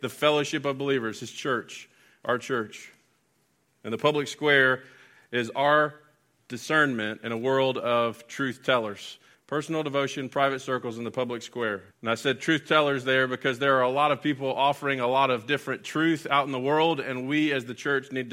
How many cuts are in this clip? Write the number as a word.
two